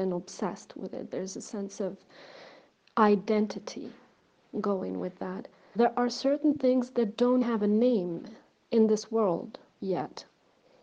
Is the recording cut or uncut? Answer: cut